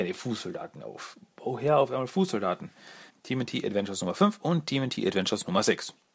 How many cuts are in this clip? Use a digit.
1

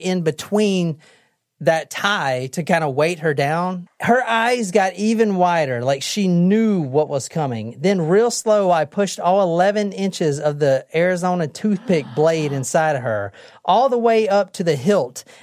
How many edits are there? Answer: 1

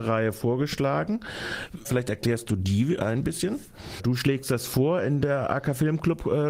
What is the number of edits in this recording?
2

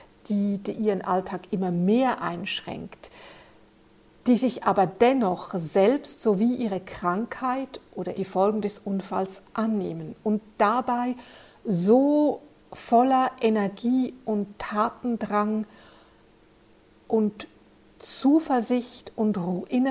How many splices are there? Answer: 1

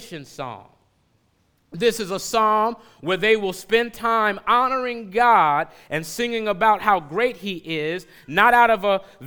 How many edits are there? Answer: 0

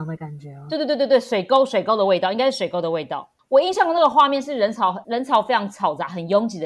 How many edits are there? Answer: 1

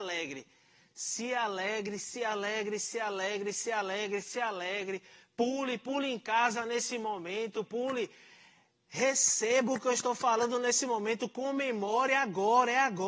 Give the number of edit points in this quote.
1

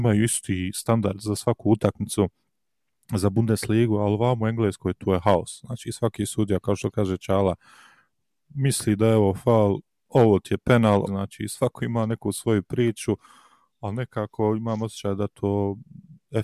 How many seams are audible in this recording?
1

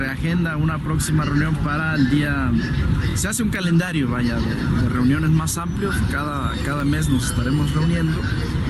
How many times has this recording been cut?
0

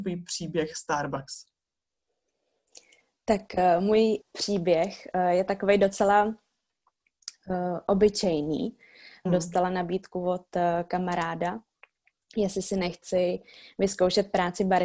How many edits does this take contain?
2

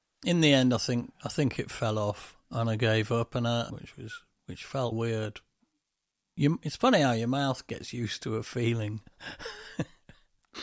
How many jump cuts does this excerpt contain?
2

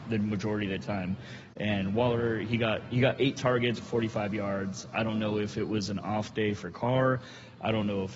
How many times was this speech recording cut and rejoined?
1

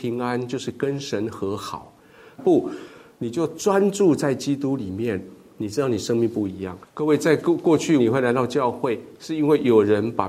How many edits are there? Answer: 3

